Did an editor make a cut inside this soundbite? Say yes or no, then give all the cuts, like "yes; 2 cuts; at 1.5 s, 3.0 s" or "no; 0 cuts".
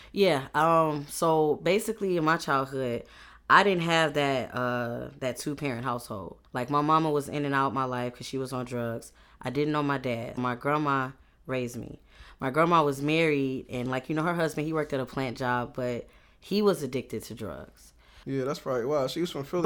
yes; 3 cuts; at 6.5 s, 10.4 s, 18.2 s